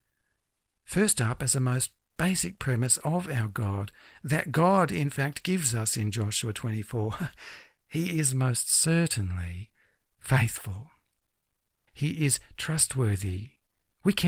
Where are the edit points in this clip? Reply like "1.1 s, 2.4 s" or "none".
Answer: 11.9 s